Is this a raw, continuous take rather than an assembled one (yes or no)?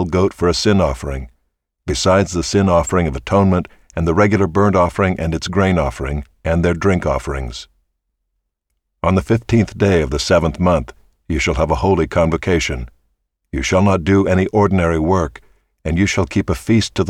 yes